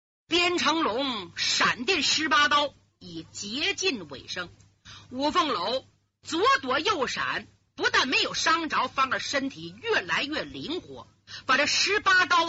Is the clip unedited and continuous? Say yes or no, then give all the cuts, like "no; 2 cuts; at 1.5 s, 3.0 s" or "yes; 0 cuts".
yes; 0 cuts